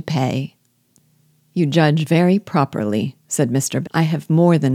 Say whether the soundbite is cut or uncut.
cut